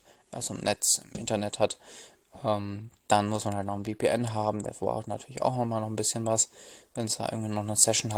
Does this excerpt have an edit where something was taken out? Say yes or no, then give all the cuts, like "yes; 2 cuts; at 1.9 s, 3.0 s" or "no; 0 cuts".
no; 0 cuts